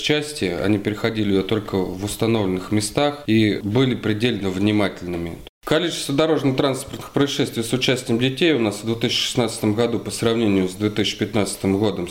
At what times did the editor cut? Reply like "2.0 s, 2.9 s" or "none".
5.4 s